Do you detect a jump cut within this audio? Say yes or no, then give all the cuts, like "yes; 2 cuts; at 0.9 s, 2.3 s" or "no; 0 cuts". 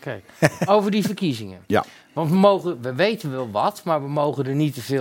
no; 0 cuts